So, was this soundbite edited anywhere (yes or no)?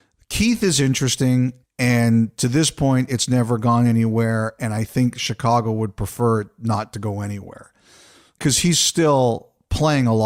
yes